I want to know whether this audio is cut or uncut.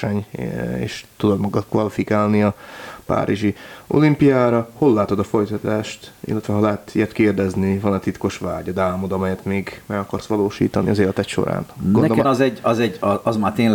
cut